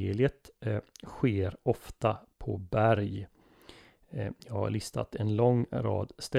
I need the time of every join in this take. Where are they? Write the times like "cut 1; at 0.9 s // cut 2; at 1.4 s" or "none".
none